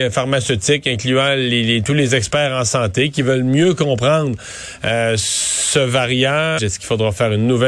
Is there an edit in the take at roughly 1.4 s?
no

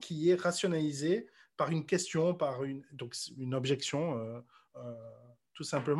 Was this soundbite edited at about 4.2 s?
no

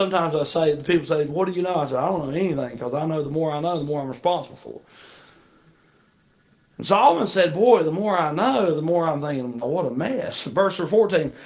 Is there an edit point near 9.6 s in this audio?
yes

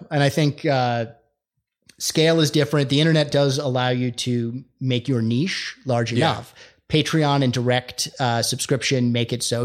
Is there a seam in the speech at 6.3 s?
no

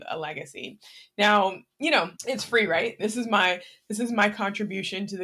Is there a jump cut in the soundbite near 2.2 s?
yes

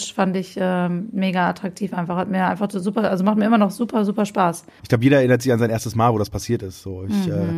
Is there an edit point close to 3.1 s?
no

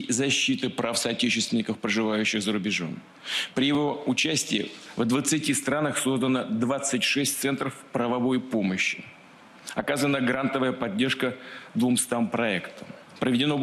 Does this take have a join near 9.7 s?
no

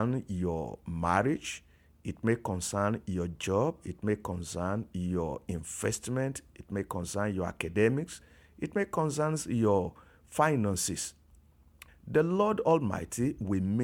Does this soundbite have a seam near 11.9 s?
yes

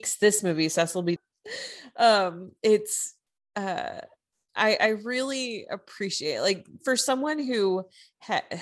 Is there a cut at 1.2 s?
yes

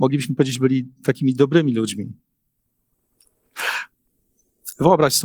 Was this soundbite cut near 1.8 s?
no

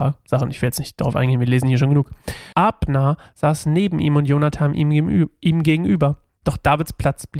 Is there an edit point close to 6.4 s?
no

